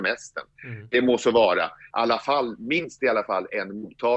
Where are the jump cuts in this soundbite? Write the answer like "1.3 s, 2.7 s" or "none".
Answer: 1.9 s